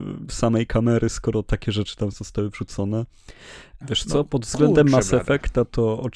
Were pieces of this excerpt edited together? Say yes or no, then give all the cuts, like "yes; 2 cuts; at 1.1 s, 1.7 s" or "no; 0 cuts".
yes; 1 cut; at 3.8 s